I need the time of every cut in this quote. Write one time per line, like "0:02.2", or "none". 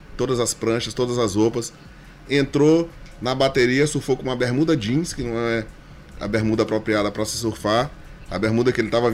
none